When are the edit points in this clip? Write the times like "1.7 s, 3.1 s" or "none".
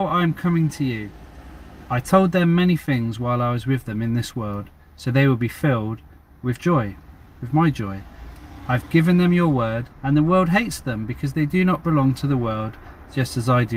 9.9 s

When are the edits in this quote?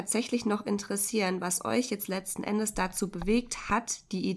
none

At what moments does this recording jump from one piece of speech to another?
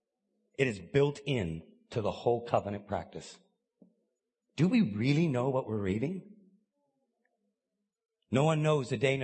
none

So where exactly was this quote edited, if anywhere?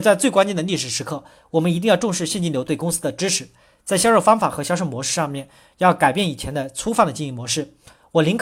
none

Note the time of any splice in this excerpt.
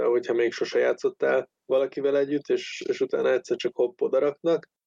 1.6 s

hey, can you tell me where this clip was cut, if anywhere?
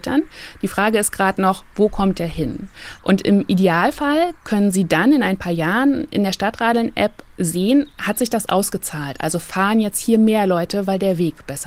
3.0 s

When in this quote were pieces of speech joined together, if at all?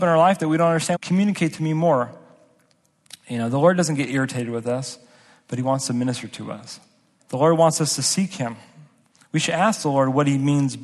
0.9 s, 7.2 s

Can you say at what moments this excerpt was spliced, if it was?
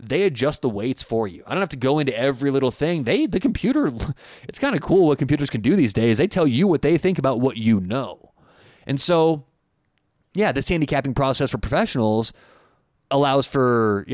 none

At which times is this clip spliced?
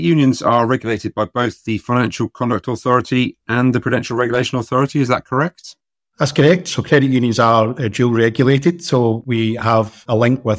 none

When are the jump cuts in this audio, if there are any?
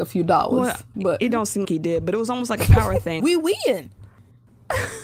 1.6 s, 3.2 s

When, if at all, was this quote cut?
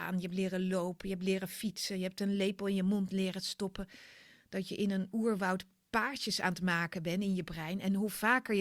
4.5 s

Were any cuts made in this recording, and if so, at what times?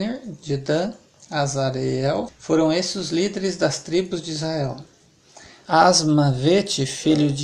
2.3 s, 5.7 s

